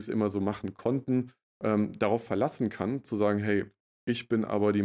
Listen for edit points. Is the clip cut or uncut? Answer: uncut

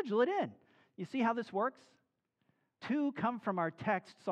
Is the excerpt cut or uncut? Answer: cut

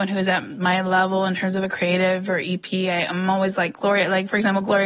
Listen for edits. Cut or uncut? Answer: uncut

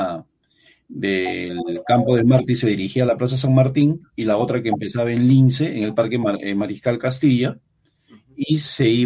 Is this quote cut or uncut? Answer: uncut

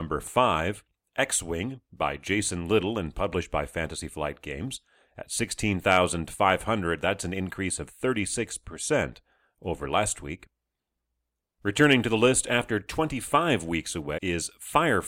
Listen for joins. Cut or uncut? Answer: cut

